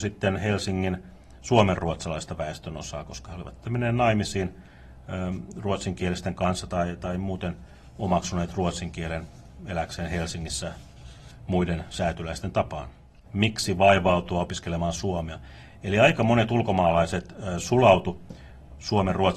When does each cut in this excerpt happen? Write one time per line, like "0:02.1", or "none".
0:13.3